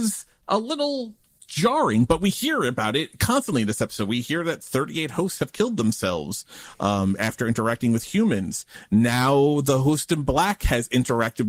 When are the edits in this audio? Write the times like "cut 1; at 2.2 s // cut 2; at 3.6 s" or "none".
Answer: none